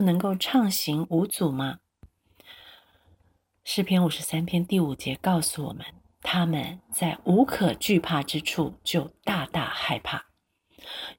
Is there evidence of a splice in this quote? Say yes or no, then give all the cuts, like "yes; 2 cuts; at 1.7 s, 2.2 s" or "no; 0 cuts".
no; 0 cuts